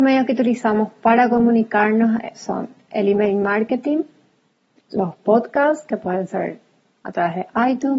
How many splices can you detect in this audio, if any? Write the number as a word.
zero